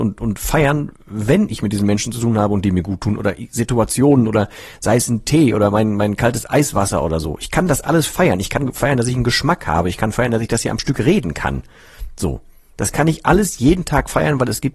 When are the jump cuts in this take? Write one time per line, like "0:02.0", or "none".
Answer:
none